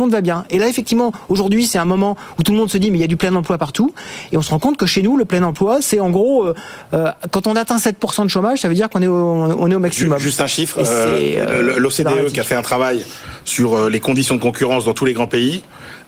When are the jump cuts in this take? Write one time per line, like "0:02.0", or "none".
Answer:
none